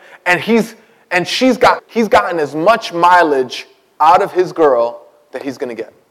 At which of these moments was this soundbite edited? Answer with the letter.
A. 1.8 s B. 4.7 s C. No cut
A